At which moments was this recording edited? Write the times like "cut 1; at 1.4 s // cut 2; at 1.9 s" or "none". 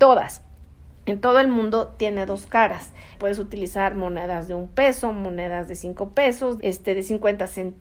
cut 1; at 3.1 s // cut 2; at 6.6 s